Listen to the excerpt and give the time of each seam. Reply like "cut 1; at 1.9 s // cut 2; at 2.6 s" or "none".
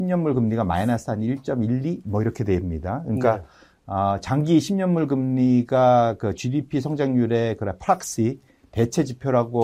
none